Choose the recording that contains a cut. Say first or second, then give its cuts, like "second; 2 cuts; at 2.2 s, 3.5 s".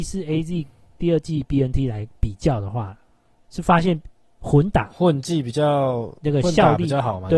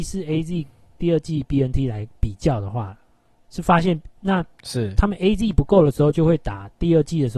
second; 1 cut; at 4.1 s